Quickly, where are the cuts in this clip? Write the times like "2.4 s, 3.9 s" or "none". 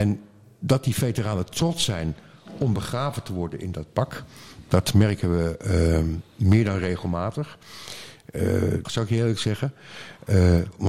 8.8 s